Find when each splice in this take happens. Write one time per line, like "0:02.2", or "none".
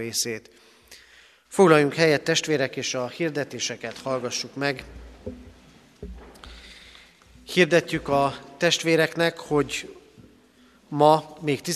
0:01.4